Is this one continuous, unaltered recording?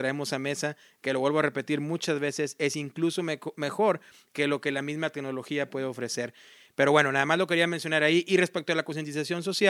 no; 1 cut; at 6.7 s

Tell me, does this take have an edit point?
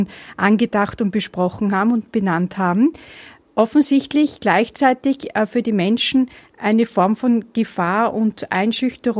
no; 0 cuts

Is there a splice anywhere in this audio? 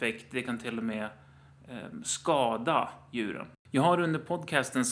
yes; 1 cut; at 3.6 s

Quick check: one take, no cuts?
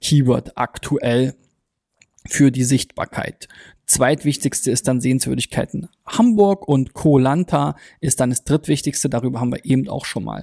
yes; 0 cuts

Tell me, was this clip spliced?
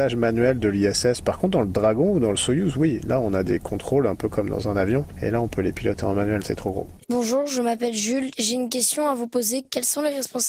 yes; 2 cuts; at 6.4 s, 8.3 s

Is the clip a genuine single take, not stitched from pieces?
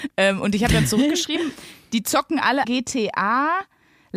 no; 1 cut; at 2.6 s

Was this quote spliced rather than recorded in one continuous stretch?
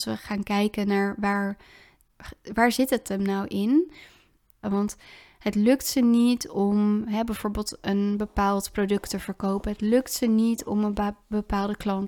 yes; 1 cut; at 4.6 s

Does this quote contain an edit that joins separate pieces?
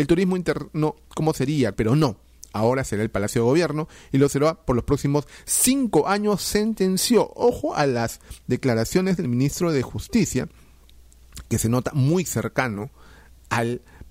yes; 1 cut; at 1.7 s

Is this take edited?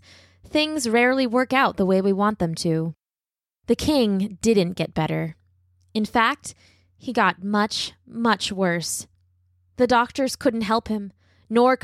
no; 0 cuts

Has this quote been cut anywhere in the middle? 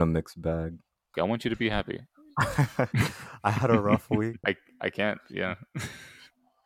yes; 2 cuts; at 1.1 s, 4.4 s

